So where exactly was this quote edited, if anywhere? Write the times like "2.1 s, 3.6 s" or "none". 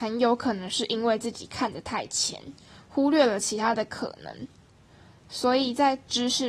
none